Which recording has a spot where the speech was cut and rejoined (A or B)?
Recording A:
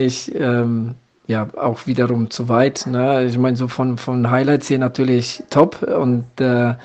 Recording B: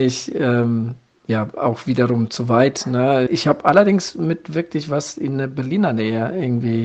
B